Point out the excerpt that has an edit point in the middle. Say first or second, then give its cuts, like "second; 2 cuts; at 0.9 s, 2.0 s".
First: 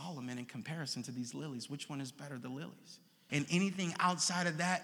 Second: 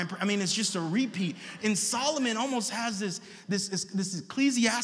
first; 1 cut; at 3.3 s